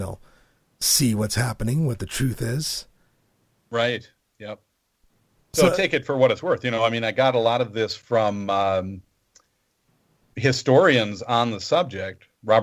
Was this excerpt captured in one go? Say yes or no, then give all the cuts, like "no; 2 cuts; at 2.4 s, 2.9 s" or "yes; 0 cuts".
yes; 0 cuts